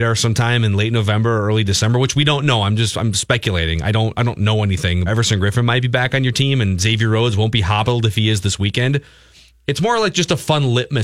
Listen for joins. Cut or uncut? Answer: cut